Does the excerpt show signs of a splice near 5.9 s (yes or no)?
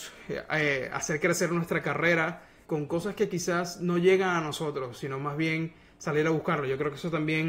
no